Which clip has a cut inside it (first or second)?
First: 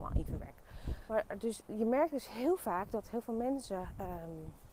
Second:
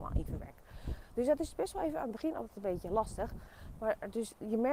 first